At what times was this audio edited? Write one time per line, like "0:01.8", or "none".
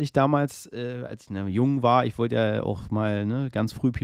none